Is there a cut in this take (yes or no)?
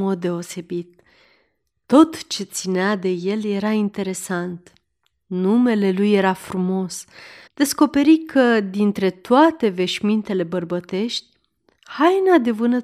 yes